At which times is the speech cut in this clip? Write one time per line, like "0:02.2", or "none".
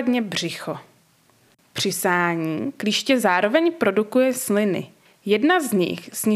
0:01.6
0:05.1

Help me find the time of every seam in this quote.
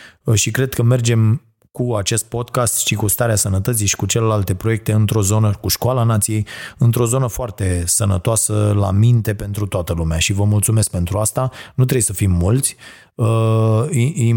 none

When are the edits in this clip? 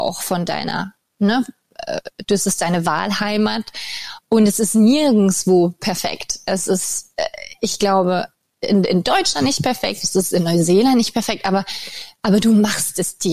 none

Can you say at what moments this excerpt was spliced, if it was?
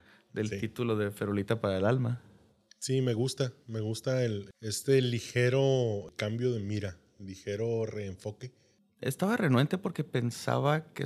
none

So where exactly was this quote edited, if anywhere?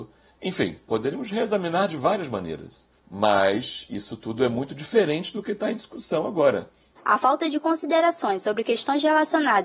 0:03.0
0:07.0

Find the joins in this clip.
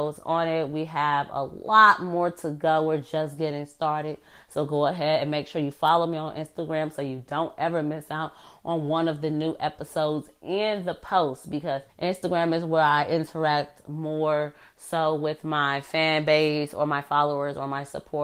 0:11.9

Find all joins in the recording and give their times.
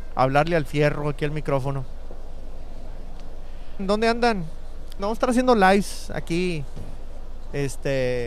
0:03.8
0:05.0

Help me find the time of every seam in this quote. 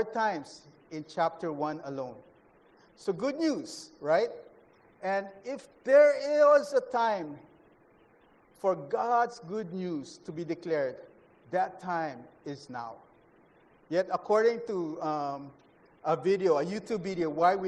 none

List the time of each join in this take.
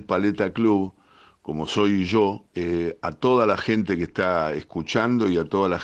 0:02.5

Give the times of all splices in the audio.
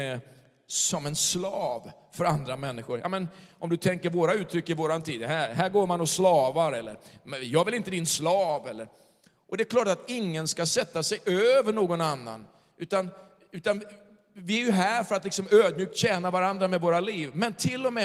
none

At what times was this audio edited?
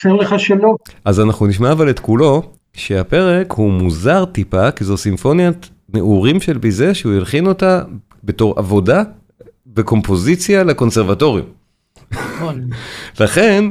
0:02.6

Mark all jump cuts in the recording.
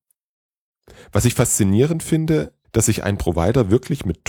0:02.6

